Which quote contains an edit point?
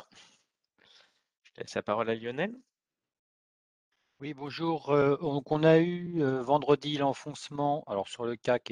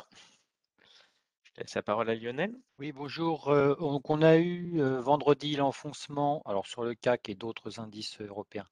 second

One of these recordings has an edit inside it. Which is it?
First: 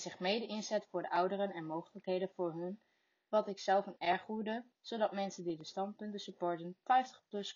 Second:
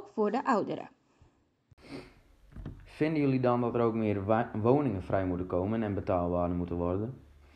first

